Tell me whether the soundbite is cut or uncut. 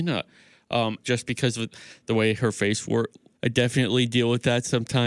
cut